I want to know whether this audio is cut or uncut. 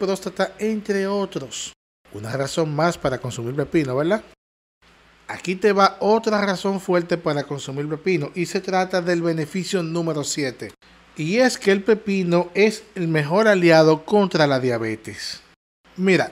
uncut